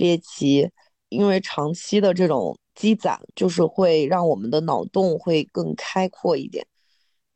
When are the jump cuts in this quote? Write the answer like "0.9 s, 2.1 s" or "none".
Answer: none